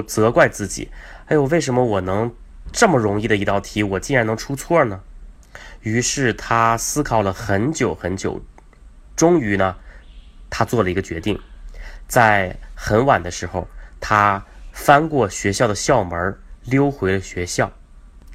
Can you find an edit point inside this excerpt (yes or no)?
no